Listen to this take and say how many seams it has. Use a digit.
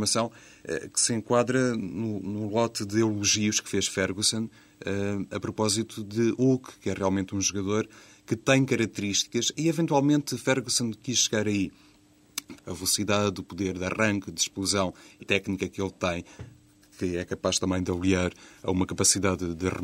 2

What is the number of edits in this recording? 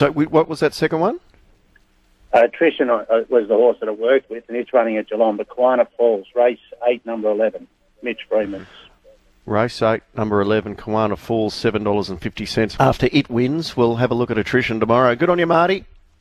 1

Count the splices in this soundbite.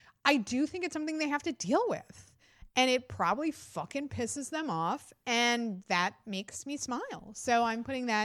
0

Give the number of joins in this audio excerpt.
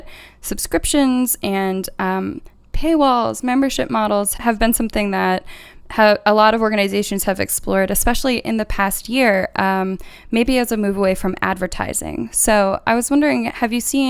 1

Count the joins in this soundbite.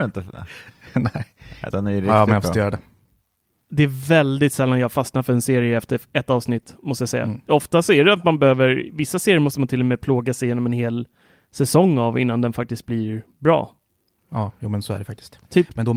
1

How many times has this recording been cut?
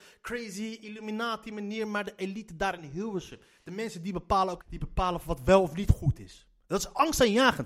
1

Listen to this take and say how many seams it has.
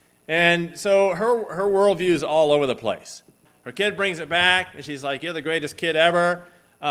1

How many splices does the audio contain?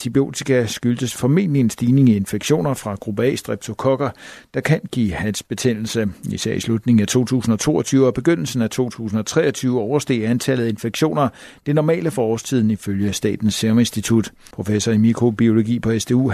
1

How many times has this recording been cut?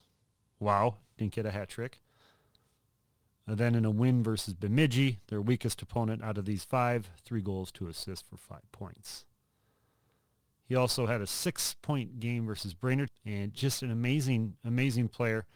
2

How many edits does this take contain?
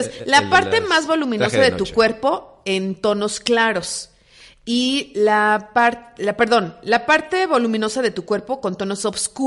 0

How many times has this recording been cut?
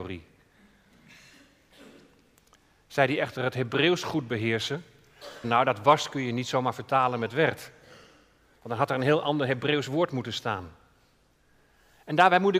1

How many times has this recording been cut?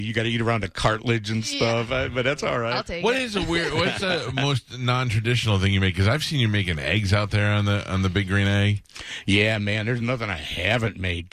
0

